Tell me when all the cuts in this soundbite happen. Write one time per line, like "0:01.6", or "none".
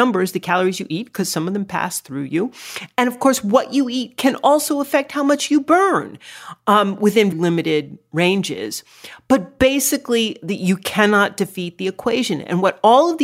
0:07.3